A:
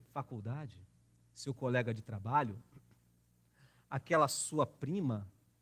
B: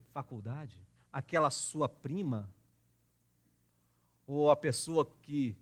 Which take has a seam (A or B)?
B